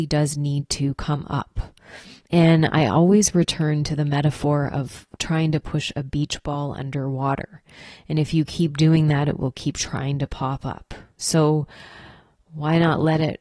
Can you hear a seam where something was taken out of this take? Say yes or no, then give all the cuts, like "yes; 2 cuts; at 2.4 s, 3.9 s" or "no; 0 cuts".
no; 0 cuts